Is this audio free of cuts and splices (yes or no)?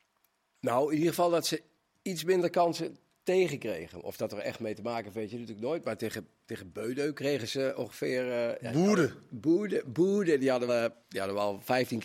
no